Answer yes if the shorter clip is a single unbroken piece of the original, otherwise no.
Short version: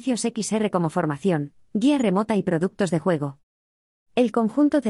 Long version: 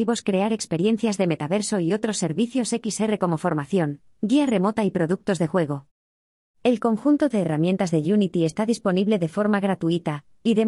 yes